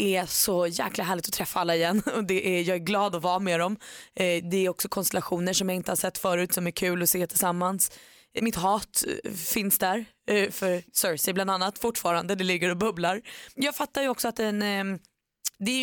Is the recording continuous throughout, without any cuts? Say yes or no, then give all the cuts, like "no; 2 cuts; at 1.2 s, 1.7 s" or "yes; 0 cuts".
no; 2 cuts; at 8.4 s, 13.6 s